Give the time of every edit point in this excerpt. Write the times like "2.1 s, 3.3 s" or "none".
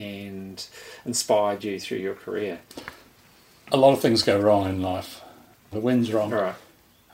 5.7 s